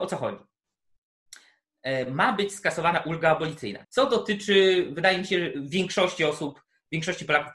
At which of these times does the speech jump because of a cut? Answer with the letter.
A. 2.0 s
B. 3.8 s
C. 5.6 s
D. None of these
B